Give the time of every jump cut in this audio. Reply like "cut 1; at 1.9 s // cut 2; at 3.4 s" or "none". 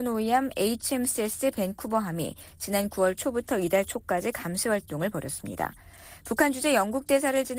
none